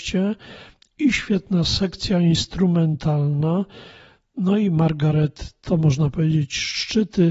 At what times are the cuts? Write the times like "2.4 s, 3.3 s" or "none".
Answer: none